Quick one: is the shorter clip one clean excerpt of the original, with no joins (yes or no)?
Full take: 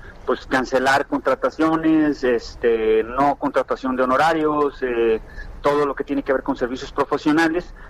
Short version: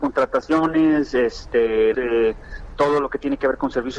no